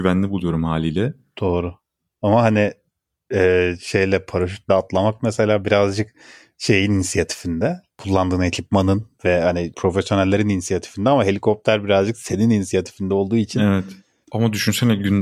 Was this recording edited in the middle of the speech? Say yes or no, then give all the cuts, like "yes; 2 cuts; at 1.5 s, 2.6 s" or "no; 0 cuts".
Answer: yes; 1 cut; at 14.2 s